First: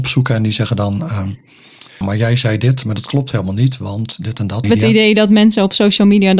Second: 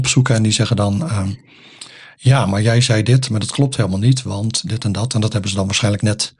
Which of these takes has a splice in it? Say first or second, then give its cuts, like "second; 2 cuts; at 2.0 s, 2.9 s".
first; 2 cuts; at 2.0 s, 4.6 s